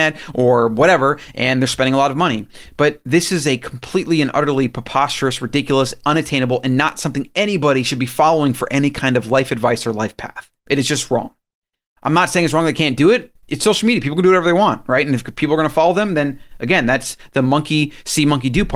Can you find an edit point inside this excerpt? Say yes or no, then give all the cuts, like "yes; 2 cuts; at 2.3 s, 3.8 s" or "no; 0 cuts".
yes; 1 cut; at 13.4 s